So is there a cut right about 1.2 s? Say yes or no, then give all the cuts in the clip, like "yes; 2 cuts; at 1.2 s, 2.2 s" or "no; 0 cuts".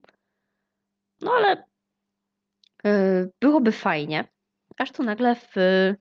yes; 1 cut; at 1.2 s